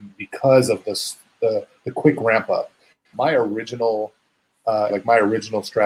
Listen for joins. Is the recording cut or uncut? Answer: cut